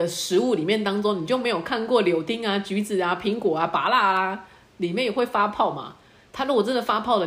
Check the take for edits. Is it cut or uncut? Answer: uncut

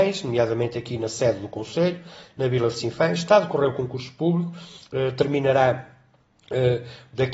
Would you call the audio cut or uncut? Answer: uncut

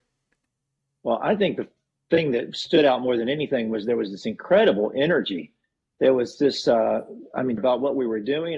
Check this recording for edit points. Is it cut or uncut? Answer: cut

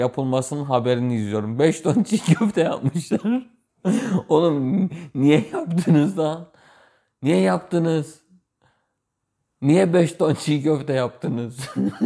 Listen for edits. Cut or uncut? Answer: uncut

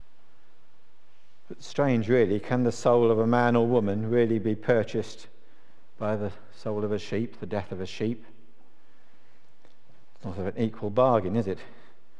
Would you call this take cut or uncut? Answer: uncut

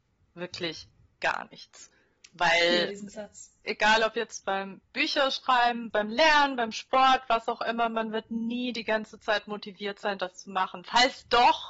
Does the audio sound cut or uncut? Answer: cut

